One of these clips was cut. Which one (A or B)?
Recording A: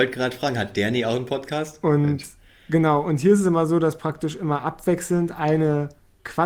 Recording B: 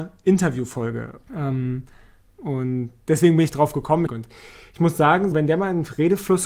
B